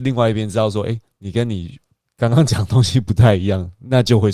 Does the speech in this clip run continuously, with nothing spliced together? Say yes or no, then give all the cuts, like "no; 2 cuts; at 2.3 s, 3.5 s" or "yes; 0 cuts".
yes; 0 cuts